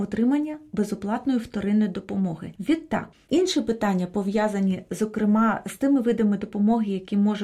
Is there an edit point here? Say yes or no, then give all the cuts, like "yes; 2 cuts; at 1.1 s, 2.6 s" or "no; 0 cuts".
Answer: yes; 1 cut; at 3.2 s